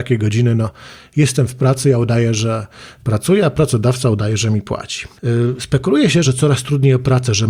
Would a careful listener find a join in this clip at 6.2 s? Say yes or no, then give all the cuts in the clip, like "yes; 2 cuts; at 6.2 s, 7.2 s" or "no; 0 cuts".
yes; 2 cuts; at 5.1 s, 6.2 s